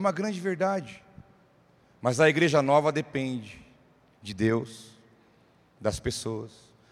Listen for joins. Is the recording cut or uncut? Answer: uncut